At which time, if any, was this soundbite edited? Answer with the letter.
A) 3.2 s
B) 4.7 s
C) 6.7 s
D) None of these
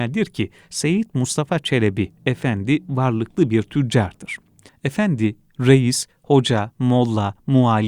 B